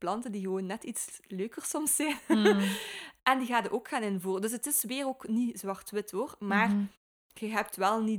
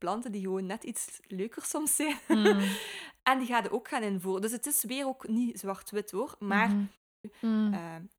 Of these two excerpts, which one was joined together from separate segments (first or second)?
second